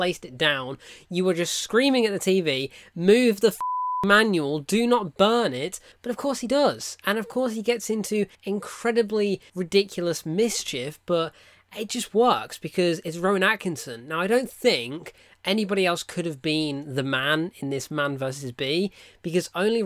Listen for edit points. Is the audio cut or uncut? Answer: uncut